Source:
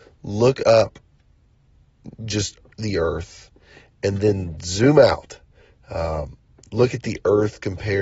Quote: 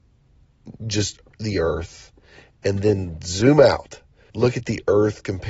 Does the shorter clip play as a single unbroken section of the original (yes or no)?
no